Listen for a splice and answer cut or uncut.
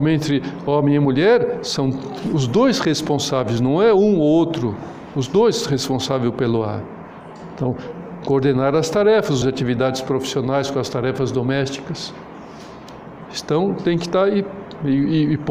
cut